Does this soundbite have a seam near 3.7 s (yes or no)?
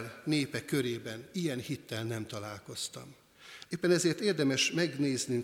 yes